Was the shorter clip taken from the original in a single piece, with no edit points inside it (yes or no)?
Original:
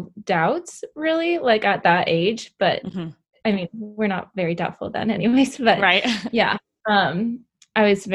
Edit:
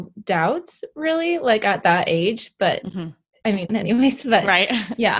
no